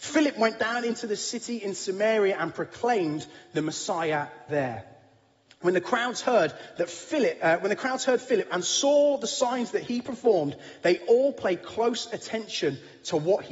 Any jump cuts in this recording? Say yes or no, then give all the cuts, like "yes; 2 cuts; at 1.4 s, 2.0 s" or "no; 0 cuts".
no; 0 cuts